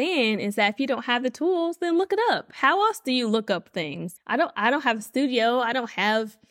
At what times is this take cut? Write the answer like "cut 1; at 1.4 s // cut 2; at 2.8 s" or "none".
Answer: cut 1; at 4.2 s